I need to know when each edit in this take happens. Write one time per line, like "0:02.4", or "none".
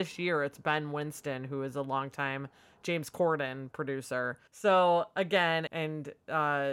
0:04.5
0:05.7